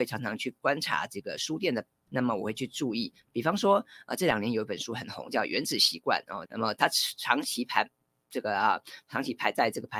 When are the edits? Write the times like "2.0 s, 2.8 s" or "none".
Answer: 2.1 s, 6.4 s